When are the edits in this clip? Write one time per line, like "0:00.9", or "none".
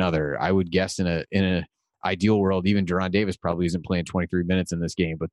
none